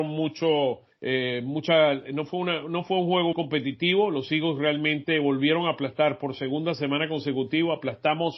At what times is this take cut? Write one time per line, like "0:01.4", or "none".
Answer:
0:03.3